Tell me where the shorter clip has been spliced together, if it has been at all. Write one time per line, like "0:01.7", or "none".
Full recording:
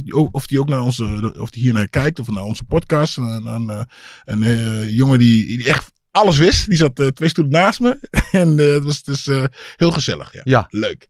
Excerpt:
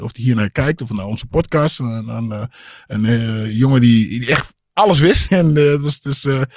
0:05.3